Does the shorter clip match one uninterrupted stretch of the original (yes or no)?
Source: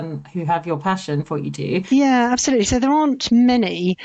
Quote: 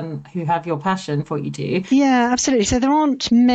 yes